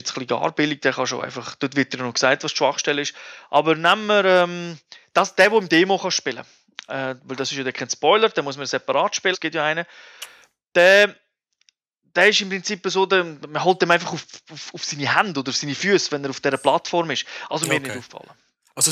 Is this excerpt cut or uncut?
cut